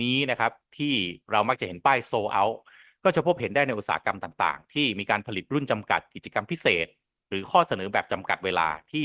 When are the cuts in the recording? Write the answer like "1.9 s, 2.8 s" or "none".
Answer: none